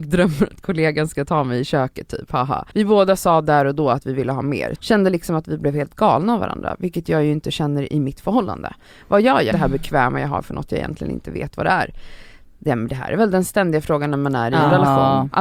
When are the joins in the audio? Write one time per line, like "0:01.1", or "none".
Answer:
0:02.7
0:04.8
0:09.5